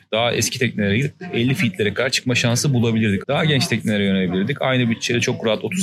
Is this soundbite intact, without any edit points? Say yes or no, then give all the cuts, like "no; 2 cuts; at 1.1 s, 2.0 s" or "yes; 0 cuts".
no; 1 cut; at 3.2 s